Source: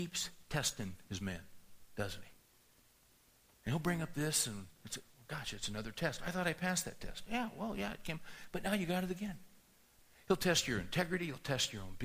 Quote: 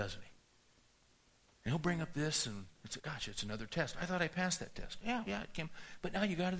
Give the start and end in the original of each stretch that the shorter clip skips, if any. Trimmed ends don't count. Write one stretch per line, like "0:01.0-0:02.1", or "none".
0:05.0-0:05.2
0:07.5-0:07.8